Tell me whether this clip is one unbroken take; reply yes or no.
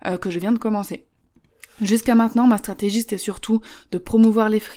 yes